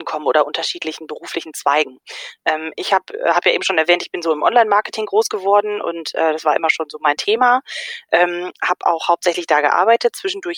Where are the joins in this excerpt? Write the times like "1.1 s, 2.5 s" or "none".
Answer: none